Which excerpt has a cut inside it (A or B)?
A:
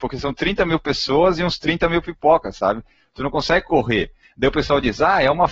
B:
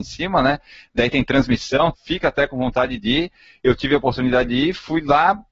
B